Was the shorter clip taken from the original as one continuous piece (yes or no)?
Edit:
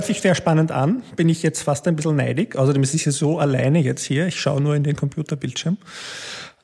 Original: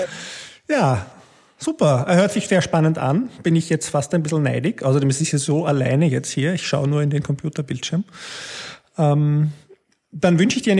yes